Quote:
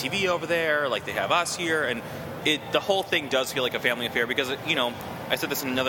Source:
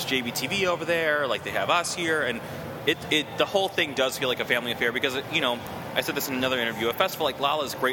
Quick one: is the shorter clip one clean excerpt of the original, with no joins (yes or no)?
no